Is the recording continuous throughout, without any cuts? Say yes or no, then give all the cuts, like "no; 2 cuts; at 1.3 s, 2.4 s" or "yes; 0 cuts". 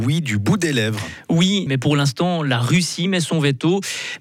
no; 1 cut; at 1.7 s